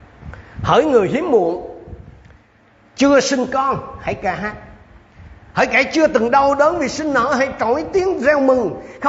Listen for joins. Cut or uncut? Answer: uncut